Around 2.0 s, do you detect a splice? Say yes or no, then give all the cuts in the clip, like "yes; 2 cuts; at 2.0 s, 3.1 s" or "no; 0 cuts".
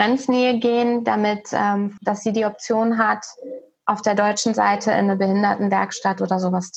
yes; 1 cut; at 2.0 s